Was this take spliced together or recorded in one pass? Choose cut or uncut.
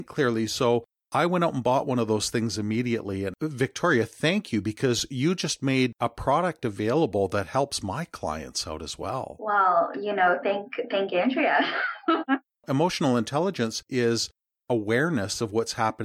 cut